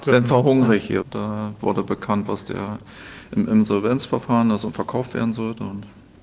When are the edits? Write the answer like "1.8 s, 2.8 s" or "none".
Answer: 1.0 s